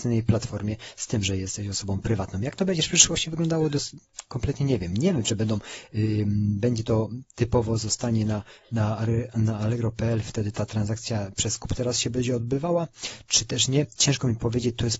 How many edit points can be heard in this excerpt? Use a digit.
0